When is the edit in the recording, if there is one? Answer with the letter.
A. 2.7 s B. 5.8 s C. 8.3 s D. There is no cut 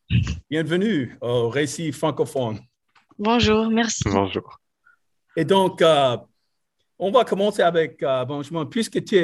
D